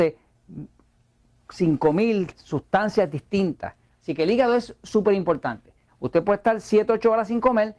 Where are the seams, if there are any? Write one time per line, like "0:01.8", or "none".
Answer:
0:03.9
0:05.9